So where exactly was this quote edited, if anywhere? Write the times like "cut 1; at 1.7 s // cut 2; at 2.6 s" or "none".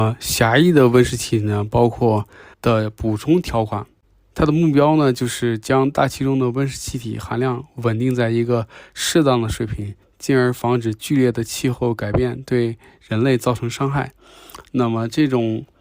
cut 1; at 2.5 s